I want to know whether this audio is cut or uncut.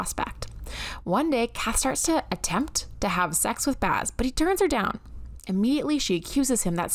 uncut